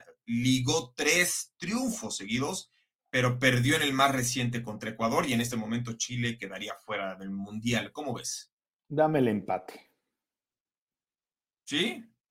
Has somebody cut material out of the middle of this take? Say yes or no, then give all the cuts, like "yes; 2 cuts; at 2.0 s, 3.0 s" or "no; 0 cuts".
no; 0 cuts